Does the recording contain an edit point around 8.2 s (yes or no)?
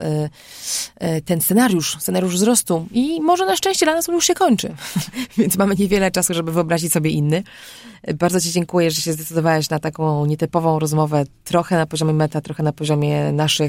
no